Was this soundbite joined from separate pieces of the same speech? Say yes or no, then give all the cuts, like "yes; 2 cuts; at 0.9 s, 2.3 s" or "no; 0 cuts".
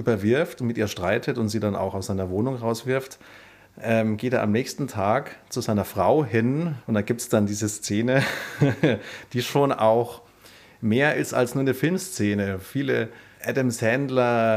no; 0 cuts